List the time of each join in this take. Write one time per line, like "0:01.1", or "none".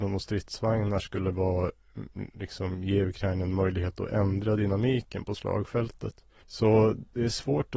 0:06.4